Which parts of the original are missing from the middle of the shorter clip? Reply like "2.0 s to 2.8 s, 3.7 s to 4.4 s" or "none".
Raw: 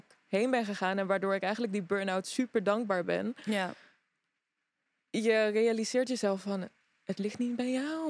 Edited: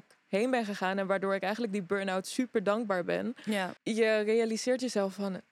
3.8 s to 5.0 s